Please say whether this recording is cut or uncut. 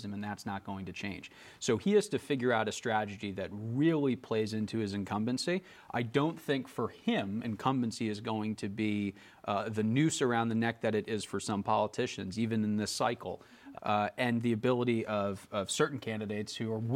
cut